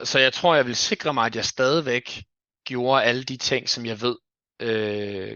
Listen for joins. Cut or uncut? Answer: uncut